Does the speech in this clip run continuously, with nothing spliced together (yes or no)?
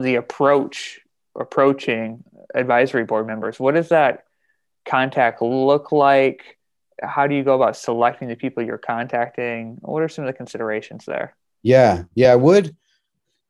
yes